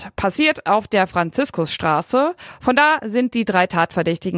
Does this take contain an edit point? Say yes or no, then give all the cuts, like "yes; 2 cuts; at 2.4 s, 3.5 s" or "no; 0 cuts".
no; 0 cuts